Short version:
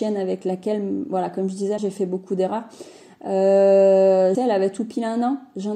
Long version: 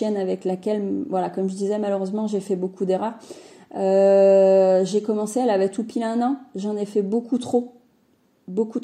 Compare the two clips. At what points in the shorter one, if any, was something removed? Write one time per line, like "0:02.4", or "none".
0:01.8
0:04.3